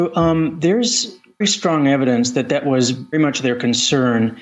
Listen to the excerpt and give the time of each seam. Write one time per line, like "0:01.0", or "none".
0:01.4
0:03.1